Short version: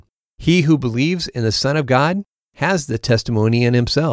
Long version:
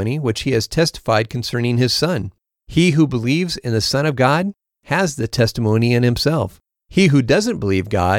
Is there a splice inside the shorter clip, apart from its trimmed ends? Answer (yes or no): no